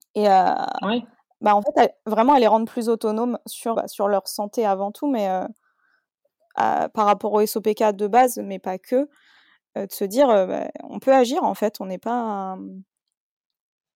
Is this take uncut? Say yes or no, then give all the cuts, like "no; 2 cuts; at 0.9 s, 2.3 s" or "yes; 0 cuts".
no; 1 cut; at 3.7 s